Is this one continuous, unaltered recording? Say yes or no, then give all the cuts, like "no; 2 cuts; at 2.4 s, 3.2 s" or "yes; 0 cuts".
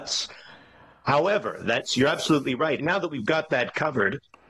no; 1 cut; at 2.8 s